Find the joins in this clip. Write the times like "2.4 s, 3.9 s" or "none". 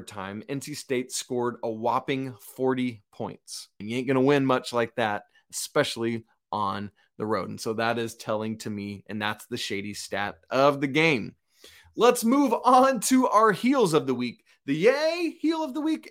3.8 s